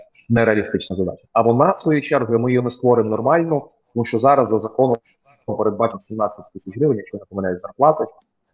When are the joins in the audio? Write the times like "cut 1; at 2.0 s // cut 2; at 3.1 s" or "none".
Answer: cut 1; at 1.3 s